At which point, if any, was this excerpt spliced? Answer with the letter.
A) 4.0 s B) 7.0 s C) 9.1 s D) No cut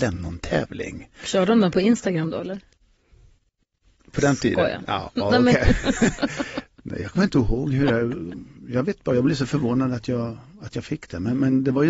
D